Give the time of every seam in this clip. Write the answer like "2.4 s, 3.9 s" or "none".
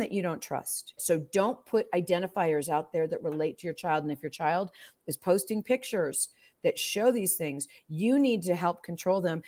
1.0 s